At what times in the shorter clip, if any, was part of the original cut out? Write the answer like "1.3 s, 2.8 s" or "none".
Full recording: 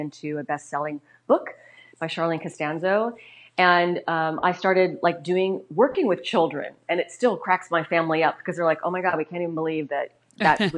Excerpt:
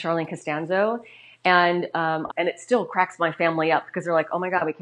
2.3 s